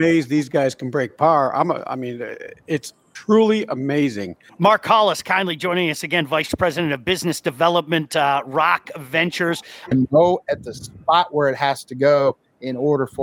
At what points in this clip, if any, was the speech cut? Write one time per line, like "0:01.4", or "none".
0:04.5
0:09.9